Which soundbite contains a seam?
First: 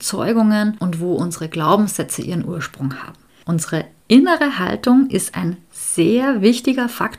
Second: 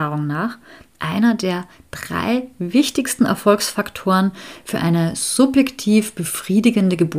first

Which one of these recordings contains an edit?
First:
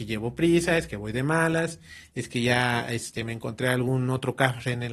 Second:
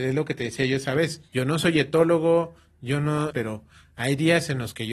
second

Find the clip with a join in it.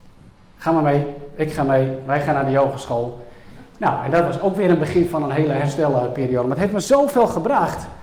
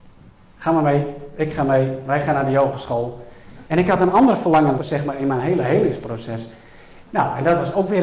second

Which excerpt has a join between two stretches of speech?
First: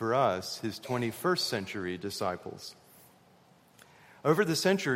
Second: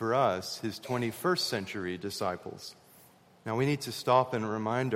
second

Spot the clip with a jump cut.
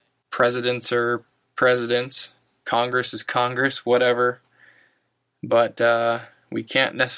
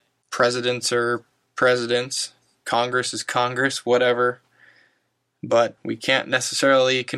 second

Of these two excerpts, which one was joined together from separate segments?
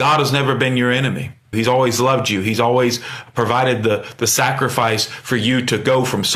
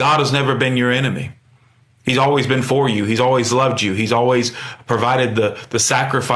first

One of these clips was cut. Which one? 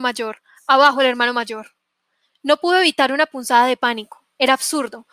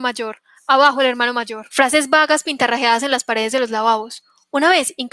second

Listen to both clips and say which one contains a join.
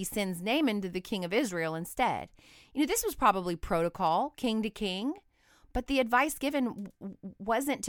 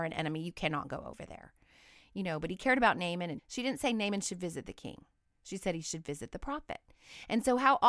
second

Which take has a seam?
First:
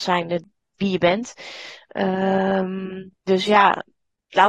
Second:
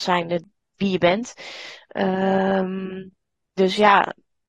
first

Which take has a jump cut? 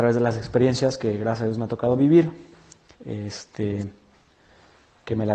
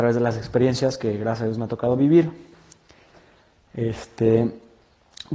first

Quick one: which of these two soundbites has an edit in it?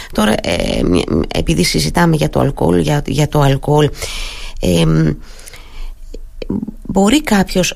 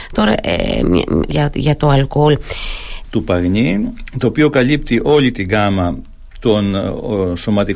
second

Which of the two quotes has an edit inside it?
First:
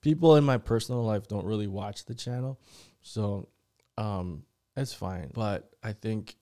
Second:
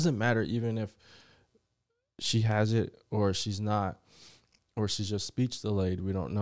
first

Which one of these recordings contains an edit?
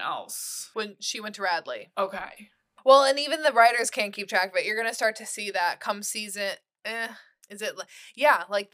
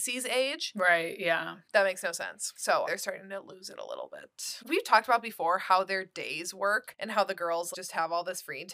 second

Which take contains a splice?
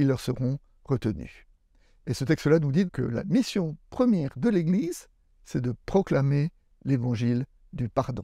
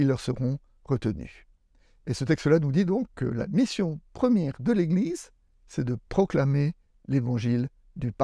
first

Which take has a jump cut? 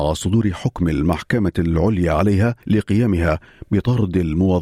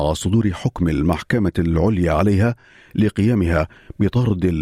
first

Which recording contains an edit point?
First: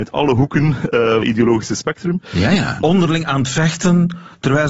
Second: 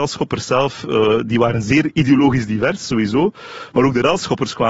first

